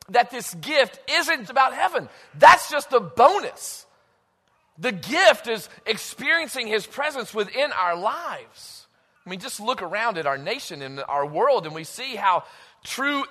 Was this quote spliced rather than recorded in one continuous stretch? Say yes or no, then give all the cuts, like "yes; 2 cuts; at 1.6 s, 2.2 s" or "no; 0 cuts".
yes; 2 cuts; at 1.5 s, 9.2 s